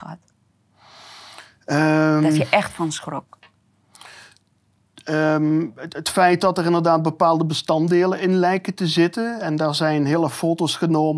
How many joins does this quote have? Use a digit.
0